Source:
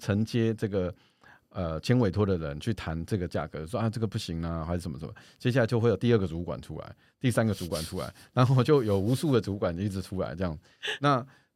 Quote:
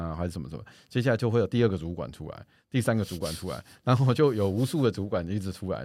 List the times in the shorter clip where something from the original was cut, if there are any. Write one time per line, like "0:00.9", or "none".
none